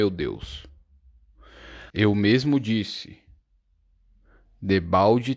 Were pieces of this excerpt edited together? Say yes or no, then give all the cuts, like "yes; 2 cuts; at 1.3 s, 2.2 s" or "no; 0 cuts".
yes; 1 cut; at 1.9 s